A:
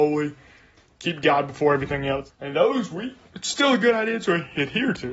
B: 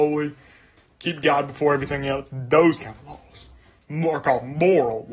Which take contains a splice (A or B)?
A